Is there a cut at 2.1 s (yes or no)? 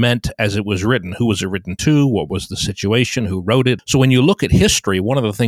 no